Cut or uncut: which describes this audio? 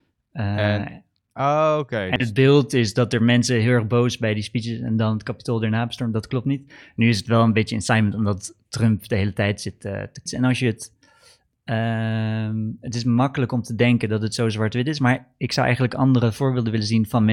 cut